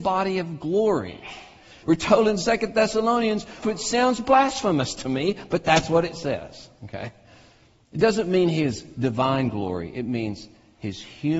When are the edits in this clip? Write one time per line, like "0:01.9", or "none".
0:01.8
0:03.6